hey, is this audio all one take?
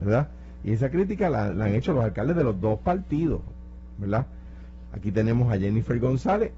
no; 1 cut; at 4.9 s

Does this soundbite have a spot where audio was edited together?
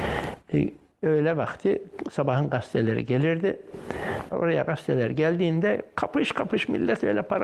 yes; 1 cut; at 4.3 s

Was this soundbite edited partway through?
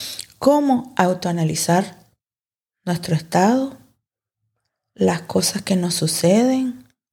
no; 0 cuts

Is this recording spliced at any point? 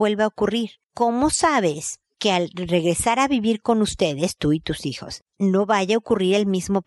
no; 0 cuts

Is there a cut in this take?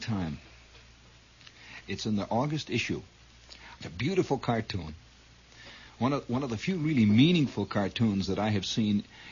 yes; 2 cuts; at 1.8 s, 3.8 s

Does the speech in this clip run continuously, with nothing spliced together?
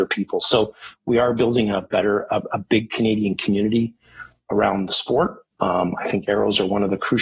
yes; 0 cuts

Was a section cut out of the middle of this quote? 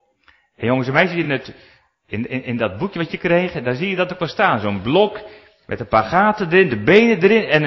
no; 0 cuts

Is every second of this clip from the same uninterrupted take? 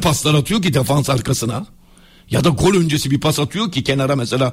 yes; 0 cuts

